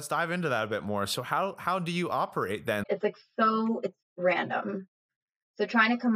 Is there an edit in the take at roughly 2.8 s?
yes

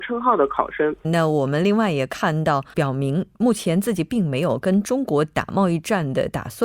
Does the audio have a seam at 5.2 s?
no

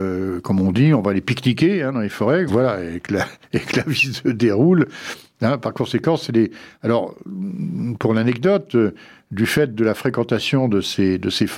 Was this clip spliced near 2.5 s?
yes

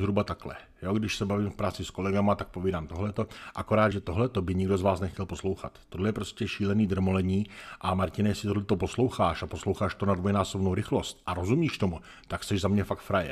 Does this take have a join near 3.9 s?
yes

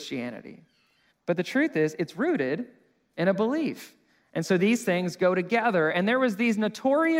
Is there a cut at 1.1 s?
yes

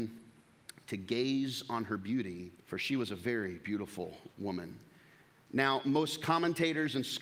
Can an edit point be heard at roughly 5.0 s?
no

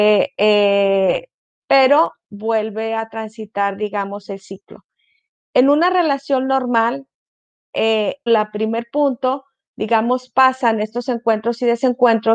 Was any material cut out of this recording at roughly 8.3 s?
yes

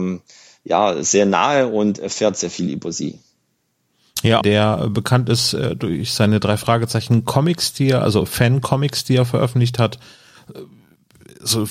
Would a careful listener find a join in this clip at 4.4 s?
yes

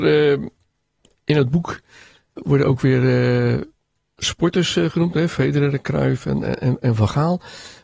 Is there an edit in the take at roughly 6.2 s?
no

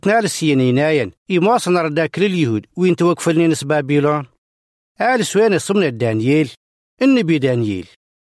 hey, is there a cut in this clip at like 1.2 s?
yes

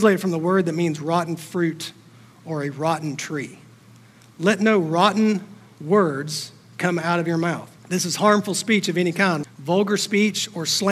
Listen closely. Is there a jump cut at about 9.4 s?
yes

